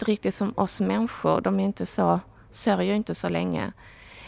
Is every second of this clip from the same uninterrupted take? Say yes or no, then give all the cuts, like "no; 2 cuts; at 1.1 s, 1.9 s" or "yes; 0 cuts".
yes; 0 cuts